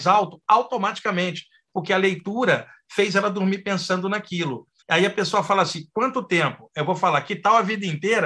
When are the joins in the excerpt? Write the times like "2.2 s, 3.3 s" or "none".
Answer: 4.8 s